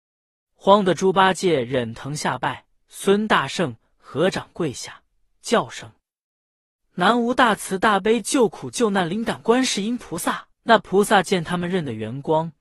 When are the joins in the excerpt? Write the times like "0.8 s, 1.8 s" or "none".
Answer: 2.8 s, 10.6 s